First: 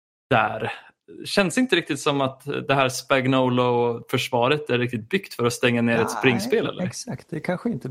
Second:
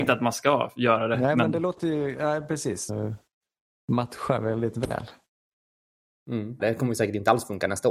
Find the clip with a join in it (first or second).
second